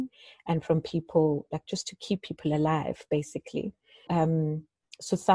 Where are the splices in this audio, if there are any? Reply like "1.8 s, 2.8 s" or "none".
4.1 s

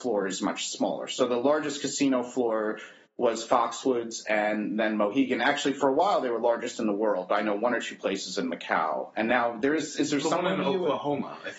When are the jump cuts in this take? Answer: none

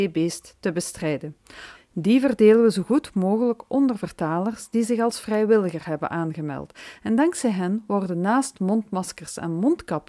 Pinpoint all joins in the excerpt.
1.7 s

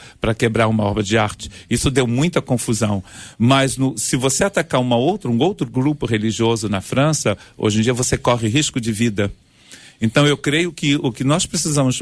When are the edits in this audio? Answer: none

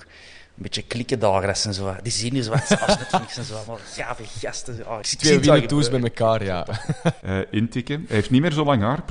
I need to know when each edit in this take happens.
5.0 s, 7.2 s

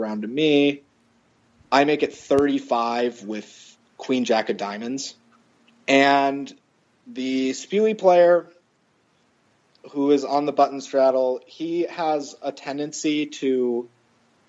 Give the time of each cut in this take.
none

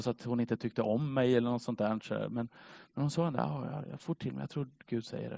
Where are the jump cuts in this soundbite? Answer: none

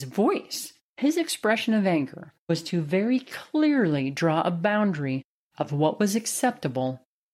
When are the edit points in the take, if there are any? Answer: 2.4 s

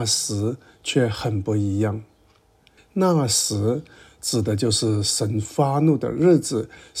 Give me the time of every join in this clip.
2.8 s

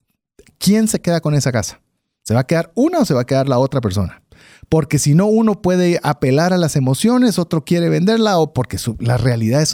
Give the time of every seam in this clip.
none

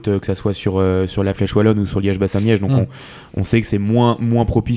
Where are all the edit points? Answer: none

